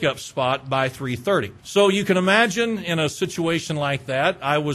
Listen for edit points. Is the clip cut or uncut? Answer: cut